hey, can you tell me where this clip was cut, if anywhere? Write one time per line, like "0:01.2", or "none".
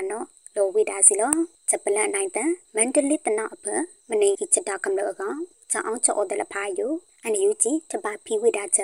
0:04.3